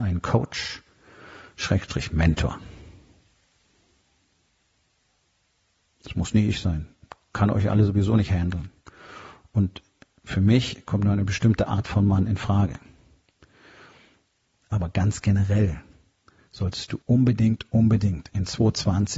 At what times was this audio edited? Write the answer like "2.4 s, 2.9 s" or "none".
17.0 s